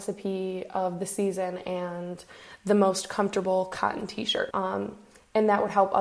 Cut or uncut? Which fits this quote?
cut